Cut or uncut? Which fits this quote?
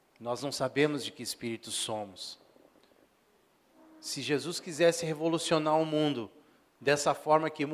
uncut